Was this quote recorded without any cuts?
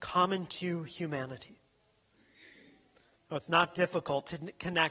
yes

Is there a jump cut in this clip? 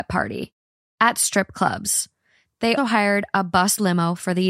yes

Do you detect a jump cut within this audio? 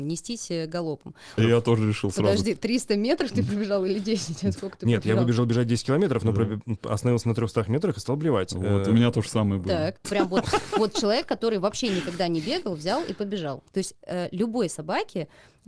yes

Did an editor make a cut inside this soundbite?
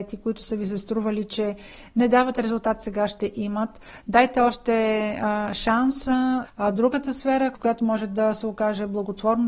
yes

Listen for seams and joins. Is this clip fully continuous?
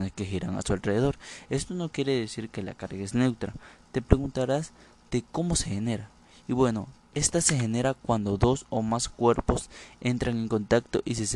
yes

